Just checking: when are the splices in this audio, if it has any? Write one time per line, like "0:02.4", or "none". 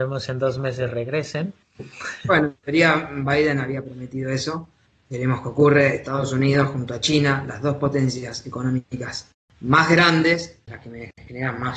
0:10.7